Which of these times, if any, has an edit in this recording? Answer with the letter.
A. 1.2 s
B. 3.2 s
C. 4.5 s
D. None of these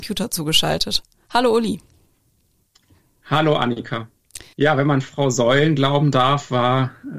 C